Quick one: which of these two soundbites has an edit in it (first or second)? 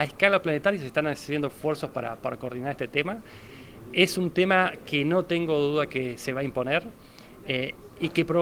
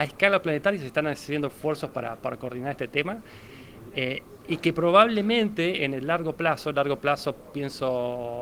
second